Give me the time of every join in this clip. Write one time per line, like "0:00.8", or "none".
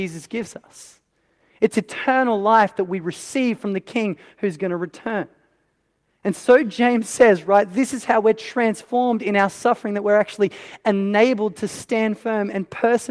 none

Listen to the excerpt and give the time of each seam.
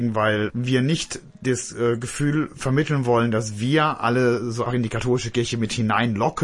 0:04.7

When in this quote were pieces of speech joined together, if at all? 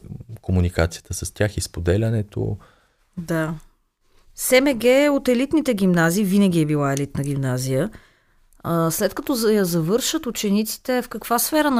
none

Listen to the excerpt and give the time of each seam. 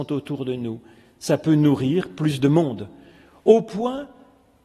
none

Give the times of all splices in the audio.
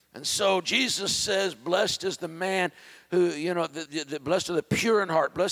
0:03.9

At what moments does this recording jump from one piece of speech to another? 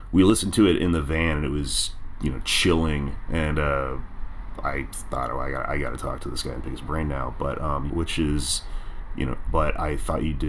0:07.9
0:09.4

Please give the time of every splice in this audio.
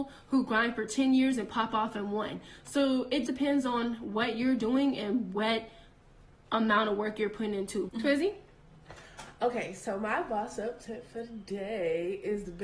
0:03.3
0:07.9

